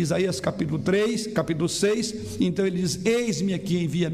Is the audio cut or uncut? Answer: uncut